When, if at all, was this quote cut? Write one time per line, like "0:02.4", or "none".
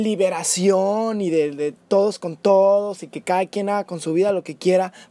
none